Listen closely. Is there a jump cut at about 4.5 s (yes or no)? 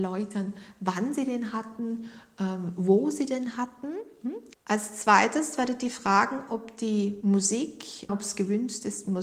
yes